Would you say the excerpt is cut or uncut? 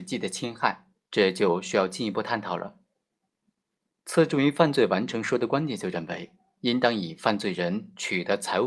cut